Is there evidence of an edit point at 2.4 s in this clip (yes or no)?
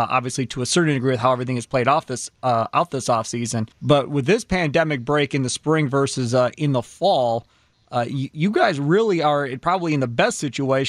no